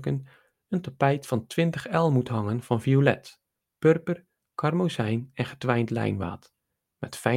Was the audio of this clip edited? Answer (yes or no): no